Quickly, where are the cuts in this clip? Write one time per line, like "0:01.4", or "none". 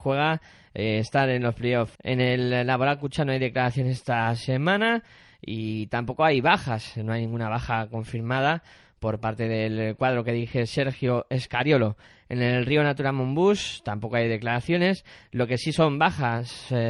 0:02.0